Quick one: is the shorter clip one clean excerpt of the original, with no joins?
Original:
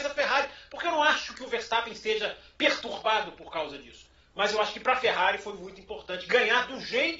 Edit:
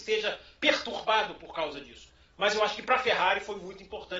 yes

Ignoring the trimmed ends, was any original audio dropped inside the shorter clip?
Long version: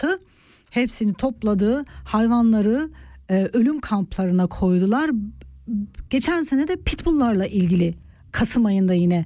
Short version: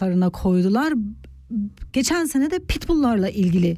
no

